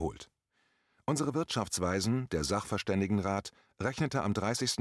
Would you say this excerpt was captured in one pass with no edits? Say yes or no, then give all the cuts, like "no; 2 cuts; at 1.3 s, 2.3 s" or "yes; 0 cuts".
yes; 0 cuts